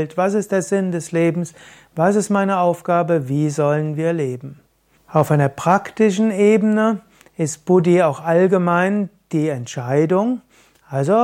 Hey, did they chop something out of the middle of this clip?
yes; 1 cut; at 5.0 s

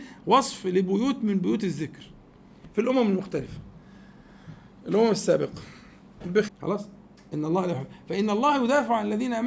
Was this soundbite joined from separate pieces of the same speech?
yes; 1 cut; at 6.5 s

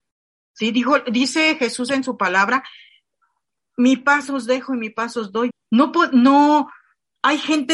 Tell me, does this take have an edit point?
yes; 1 cut; at 5.5 s

